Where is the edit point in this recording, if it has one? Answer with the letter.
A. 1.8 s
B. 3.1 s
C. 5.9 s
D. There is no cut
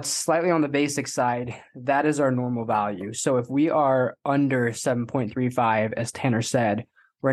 D